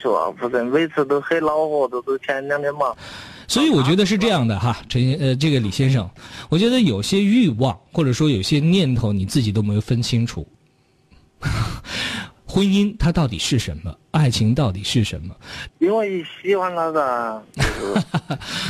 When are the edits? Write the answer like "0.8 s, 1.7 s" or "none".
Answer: 15.7 s